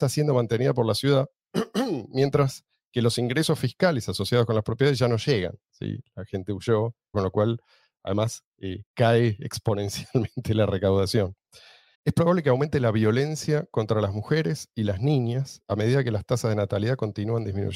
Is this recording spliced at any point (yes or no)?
yes